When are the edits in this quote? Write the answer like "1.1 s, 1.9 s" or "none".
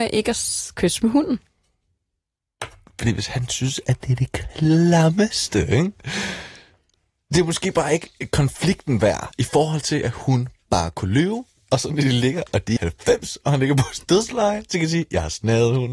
12.8 s